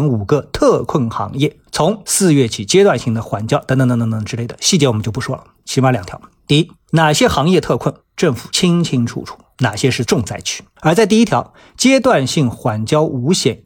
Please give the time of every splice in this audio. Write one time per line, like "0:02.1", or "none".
0:05.6
0:10.7